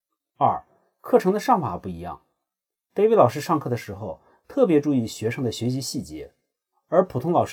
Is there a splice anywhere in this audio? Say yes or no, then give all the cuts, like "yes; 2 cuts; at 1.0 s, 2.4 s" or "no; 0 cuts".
no; 0 cuts